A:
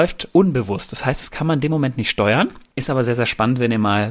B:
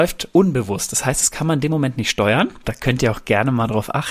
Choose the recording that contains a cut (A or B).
B